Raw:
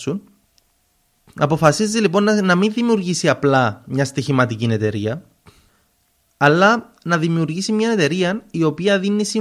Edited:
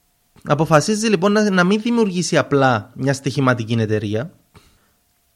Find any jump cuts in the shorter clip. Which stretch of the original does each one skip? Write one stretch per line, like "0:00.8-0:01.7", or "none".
none